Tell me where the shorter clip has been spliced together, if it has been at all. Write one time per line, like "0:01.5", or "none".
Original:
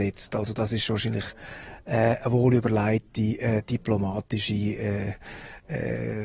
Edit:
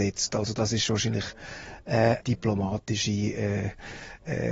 0:02.2